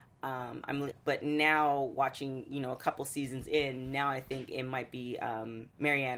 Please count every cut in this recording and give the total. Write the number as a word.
one